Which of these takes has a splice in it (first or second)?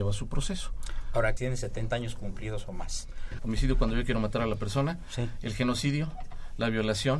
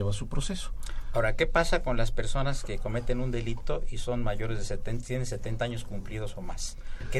first